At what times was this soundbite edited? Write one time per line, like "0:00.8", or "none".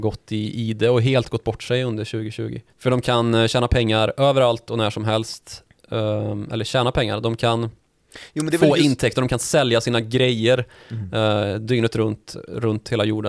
0:02.7